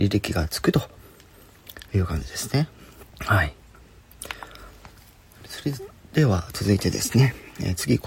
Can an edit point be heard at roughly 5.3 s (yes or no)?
no